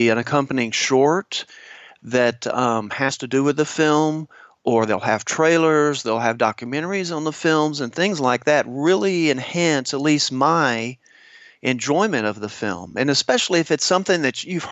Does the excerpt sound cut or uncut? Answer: uncut